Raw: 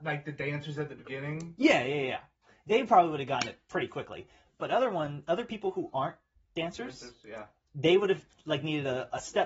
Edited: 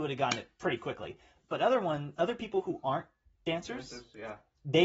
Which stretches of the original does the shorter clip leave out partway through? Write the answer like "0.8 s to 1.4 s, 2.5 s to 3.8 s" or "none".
none